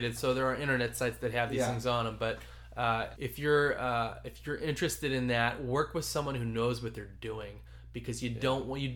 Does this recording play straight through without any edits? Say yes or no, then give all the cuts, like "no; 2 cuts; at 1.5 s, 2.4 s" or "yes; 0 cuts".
no; 1 cut; at 3.2 s